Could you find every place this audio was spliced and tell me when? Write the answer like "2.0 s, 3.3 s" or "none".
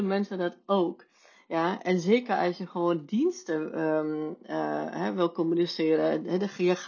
none